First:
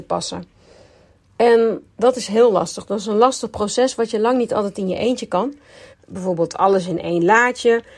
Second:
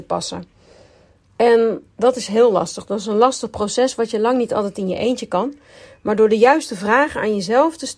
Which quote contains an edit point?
first; 1 cut; at 5.9 s

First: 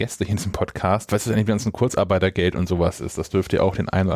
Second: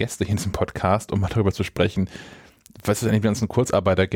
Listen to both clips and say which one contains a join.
first; 1 cut; at 1.1 s

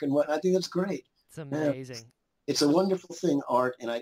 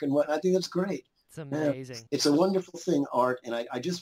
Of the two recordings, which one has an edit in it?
second; 1 cut; at 2.1 s

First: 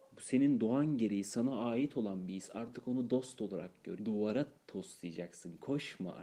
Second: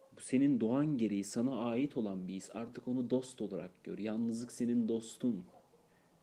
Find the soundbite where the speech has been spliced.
first; 1 cut; at 4.0 s

